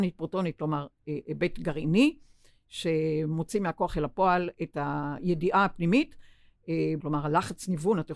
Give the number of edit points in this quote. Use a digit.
1